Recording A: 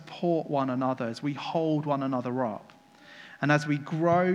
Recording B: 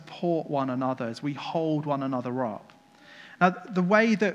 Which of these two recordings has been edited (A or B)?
B